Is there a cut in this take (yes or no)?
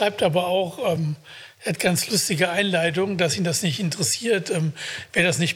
no